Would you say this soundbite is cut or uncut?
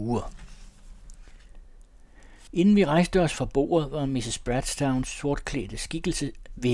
uncut